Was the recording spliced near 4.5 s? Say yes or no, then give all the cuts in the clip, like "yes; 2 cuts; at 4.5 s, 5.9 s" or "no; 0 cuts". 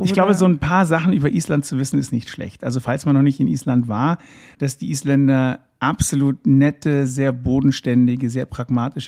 yes; 1 cut; at 4.5 s